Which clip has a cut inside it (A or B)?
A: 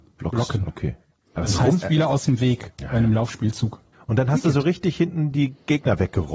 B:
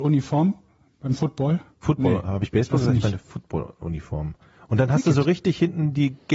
A